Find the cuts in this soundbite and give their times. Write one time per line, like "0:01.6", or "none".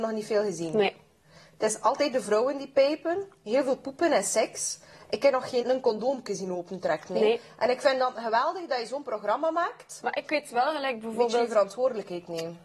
0:05.6